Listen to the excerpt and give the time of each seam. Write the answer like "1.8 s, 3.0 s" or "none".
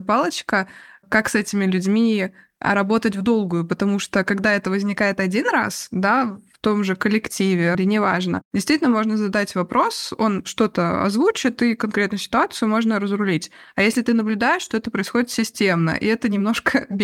7.7 s